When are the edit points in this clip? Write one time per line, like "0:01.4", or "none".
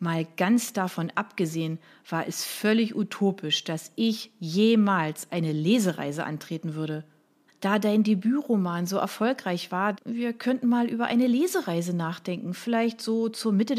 0:07.5
0:09.9